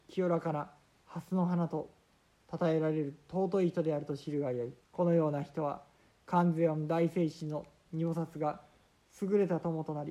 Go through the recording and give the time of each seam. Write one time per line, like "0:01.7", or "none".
0:04.8